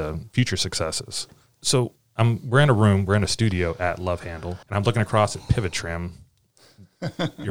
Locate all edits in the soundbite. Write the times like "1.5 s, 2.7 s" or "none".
none

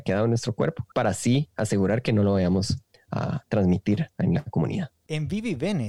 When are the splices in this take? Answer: 0.9 s

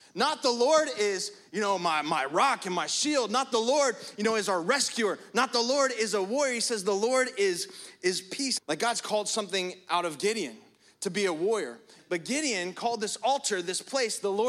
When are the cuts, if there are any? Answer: 8.6 s, 12.0 s

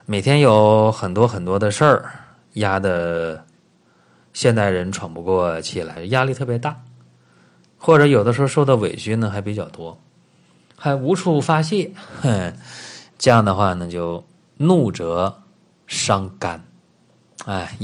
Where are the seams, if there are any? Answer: 6.0 s

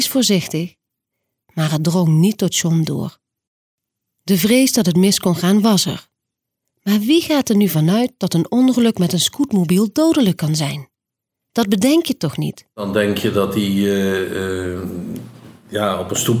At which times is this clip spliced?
none

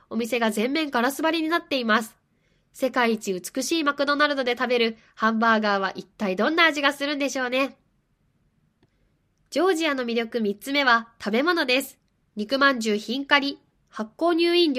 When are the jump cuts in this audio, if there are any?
none

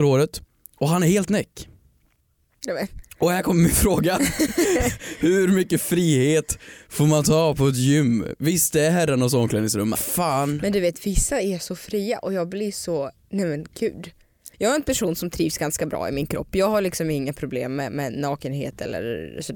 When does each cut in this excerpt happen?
9.9 s, 14.5 s

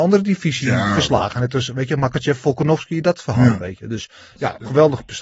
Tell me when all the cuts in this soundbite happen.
none

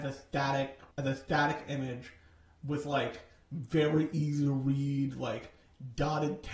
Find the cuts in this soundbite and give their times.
0.9 s

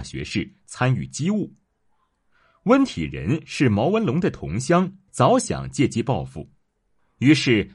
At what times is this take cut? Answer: 5.1 s

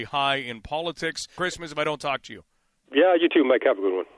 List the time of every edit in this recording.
1.4 s

